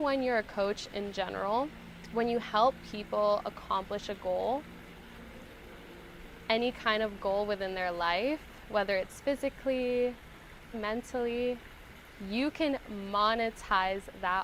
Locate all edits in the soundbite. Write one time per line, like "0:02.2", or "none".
0:10.7